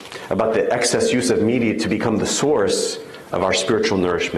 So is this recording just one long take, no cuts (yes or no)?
yes